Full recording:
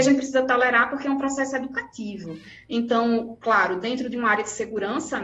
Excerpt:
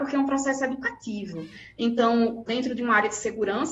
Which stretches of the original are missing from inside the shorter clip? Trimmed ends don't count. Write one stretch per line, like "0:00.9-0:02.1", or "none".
0:03.4-0:03.8